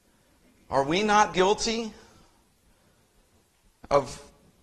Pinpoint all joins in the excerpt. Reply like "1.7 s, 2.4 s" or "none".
1.3 s